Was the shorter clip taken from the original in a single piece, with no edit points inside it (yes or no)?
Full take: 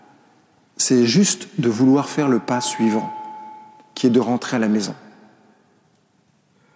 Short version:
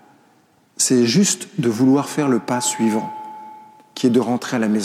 yes